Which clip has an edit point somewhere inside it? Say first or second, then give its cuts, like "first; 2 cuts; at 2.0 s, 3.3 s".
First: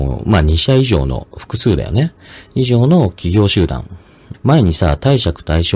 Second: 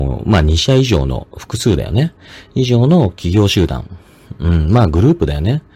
first; 1 cut; at 4.3 s